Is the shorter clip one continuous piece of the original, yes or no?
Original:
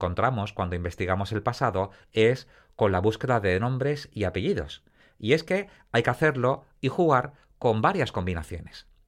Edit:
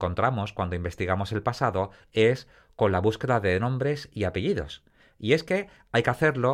yes